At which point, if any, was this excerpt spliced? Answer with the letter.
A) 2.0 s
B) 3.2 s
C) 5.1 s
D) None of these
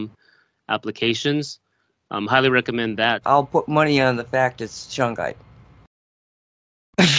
B